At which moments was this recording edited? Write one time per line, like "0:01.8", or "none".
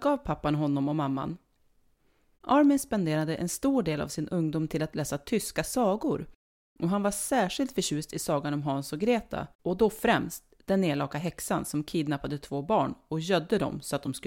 0:02.3
0:09.5